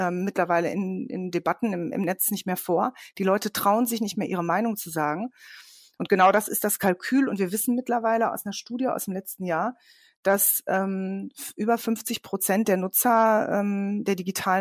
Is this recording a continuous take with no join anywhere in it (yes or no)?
no